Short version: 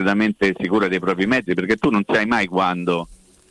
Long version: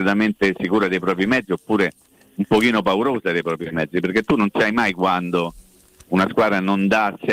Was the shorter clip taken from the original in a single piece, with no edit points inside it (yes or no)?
no